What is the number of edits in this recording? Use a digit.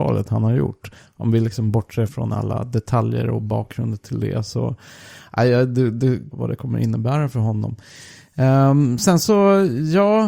2